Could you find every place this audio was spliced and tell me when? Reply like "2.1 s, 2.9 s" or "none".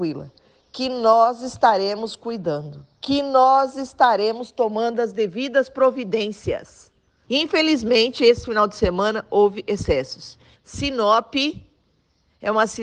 7.2 s, 10.5 s